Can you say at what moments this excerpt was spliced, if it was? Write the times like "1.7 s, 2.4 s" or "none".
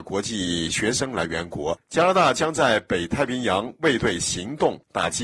1.8 s